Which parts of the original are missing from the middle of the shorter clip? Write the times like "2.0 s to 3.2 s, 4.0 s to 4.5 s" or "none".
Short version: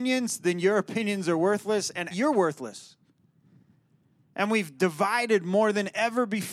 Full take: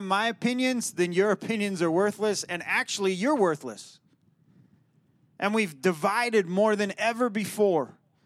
2.6 s to 3.1 s